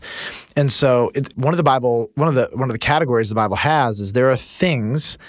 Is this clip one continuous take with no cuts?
no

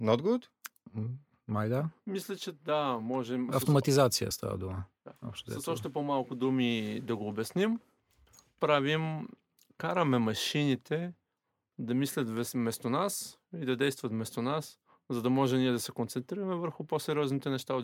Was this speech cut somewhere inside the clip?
no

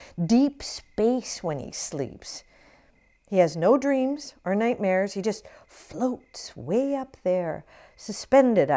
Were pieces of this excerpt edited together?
no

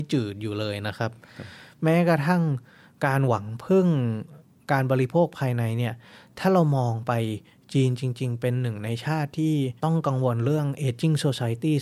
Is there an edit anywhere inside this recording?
yes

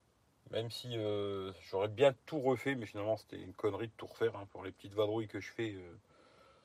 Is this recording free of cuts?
yes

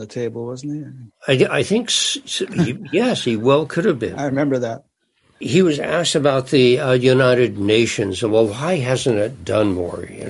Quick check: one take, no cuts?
yes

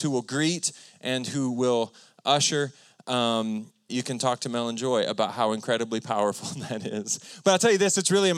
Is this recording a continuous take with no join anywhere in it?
no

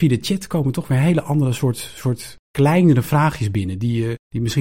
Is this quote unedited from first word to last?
yes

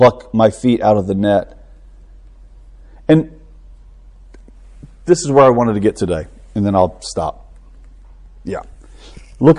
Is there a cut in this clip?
no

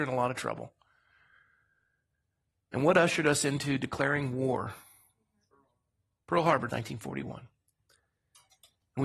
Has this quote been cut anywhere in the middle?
yes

